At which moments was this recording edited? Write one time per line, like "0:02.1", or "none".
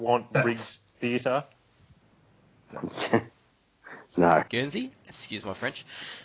0:02.7
0:04.4